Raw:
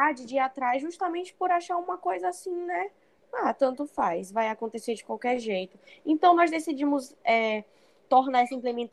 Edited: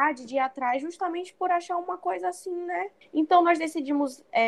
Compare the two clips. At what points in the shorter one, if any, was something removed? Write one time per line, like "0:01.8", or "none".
0:03.0